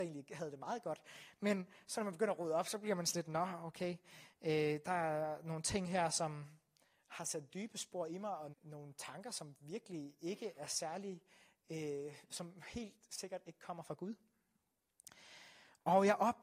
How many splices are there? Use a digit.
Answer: 1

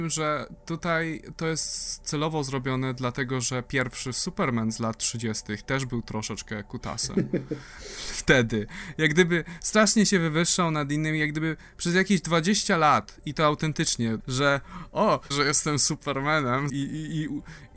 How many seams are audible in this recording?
3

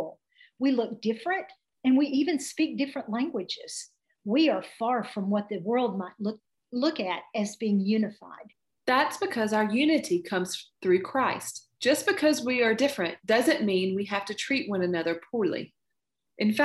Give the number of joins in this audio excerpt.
1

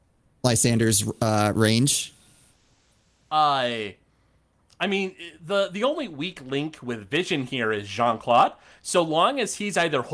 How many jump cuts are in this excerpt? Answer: 0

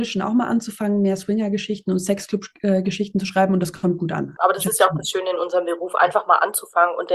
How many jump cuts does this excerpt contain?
1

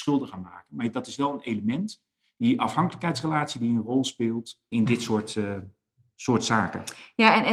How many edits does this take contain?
1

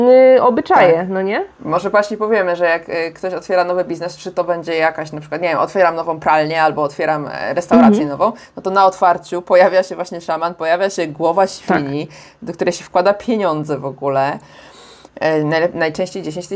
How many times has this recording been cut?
1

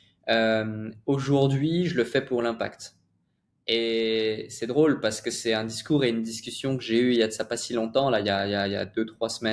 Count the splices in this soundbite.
0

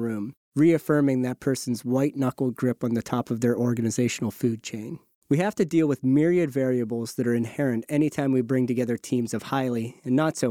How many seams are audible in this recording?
1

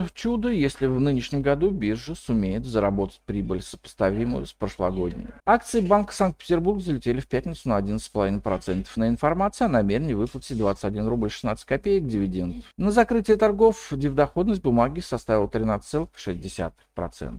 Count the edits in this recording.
2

